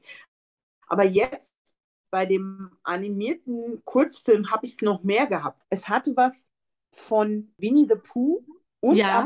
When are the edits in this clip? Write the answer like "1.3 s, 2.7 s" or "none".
none